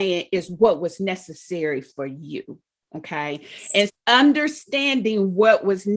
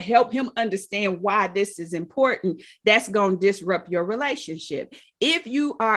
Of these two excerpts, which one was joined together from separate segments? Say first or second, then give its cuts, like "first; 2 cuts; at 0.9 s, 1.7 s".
first; 1 cut; at 3.9 s